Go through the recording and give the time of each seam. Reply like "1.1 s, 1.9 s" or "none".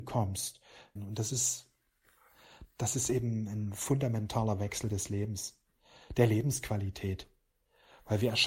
1.0 s